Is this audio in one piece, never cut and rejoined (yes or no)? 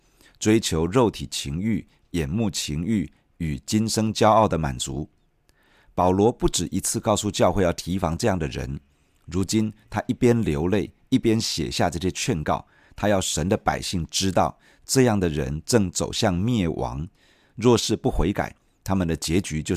yes